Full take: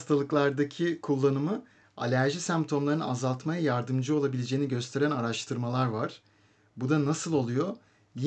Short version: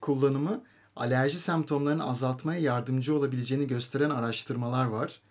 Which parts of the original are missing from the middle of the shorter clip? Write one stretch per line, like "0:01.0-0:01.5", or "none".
none